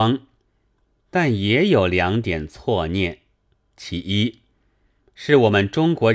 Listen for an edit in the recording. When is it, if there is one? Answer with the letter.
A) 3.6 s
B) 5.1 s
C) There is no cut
C